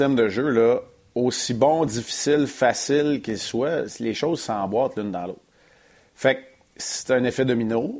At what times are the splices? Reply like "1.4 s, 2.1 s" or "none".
none